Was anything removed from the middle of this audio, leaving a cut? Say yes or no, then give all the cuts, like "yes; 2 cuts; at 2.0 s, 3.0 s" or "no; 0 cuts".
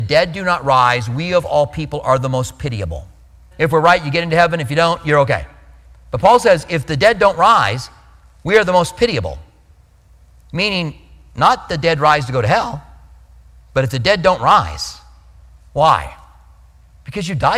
yes; 1 cut; at 3.5 s